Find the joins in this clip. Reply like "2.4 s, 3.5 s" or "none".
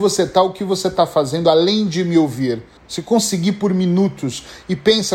2.8 s